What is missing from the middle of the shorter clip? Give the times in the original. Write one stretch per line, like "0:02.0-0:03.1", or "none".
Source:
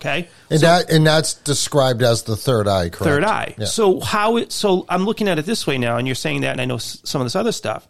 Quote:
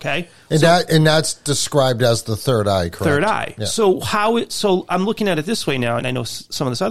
0:06.0-0:06.5